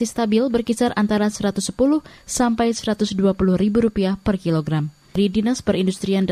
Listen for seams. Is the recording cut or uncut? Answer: cut